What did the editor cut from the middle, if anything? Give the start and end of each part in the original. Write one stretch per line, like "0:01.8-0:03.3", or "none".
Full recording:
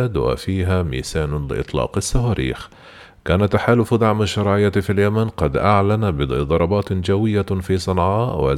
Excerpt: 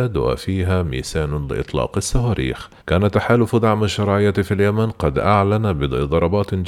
0:02.8-0:03.2